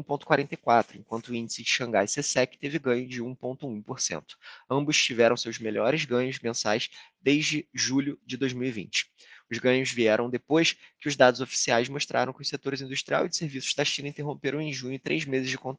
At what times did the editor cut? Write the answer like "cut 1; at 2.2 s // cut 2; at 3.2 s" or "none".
none